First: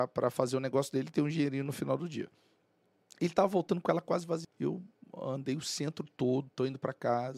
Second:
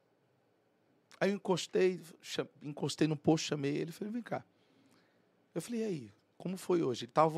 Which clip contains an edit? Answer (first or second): first